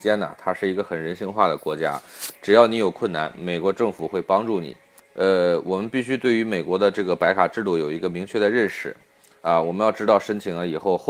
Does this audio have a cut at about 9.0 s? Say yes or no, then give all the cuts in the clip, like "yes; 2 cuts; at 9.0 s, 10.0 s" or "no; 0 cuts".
no; 1 cut; at 5.0 s